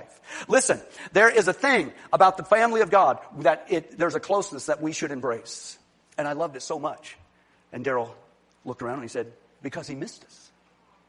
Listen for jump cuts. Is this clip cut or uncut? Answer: cut